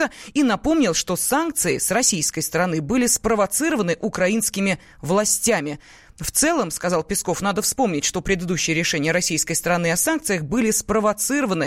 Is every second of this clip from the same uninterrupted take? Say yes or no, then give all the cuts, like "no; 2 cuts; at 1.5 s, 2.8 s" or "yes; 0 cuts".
yes; 0 cuts